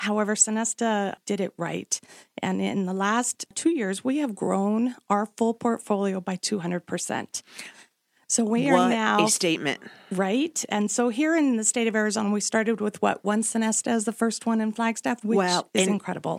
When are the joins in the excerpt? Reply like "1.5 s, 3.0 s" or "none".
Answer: 15.2 s